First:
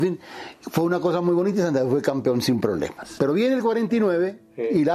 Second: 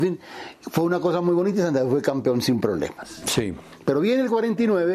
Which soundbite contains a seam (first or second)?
first